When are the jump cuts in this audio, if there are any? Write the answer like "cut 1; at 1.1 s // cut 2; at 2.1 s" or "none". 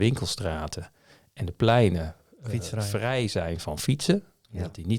none